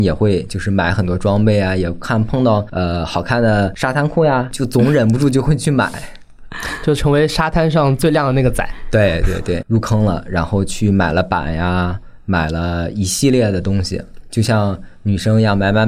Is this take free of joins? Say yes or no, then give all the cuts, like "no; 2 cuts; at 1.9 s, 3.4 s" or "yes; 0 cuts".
no; 2 cuts; at 9.6 s, 14.2 s